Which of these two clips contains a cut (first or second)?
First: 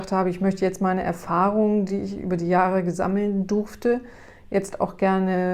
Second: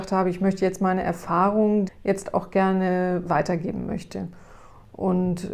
second